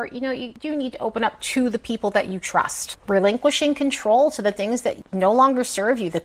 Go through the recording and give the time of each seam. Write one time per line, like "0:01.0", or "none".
none